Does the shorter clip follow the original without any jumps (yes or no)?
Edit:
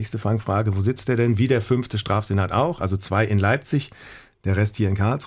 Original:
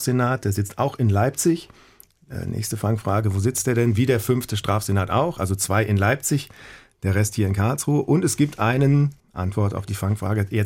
yes